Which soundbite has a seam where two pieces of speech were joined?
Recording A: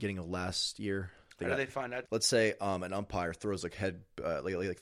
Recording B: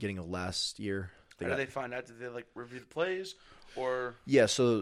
A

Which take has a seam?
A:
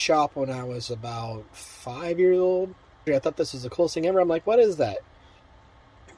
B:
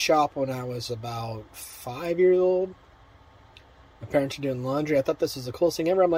A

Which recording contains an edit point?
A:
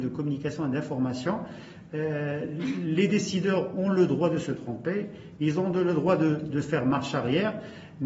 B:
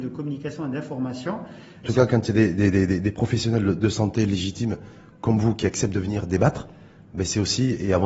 B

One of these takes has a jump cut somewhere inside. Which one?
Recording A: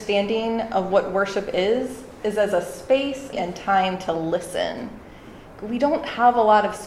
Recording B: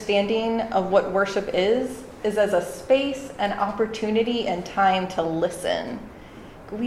A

